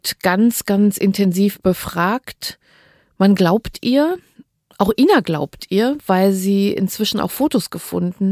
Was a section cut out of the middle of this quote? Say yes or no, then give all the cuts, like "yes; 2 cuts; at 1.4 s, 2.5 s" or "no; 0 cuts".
no; 0 cuts